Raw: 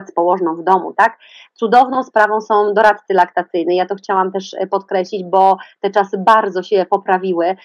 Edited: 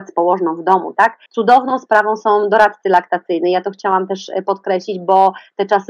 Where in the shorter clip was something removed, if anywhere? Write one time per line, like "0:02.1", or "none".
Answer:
0:01.3